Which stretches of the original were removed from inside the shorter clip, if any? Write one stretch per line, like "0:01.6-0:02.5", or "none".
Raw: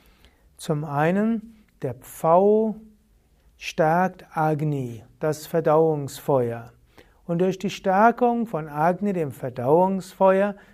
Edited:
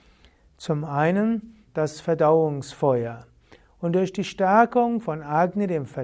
0:01.7-0:05.1